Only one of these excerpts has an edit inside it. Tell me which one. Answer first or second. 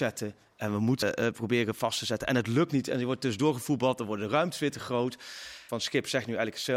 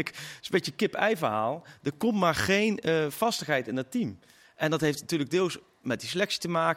first